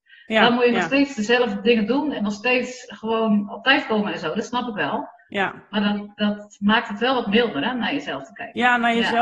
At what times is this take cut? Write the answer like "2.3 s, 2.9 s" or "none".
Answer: none